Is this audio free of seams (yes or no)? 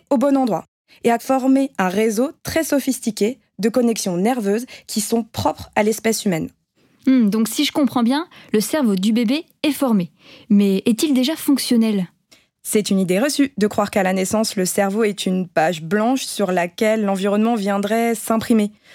yes